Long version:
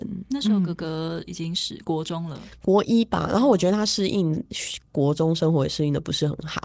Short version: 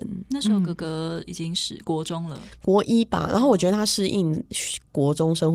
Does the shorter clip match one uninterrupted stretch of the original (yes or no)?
yes